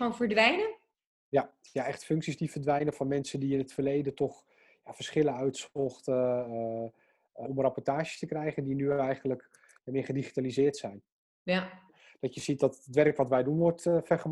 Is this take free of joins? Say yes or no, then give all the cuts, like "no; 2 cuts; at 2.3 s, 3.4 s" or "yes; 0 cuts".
no; 1 cut; at 7.4 s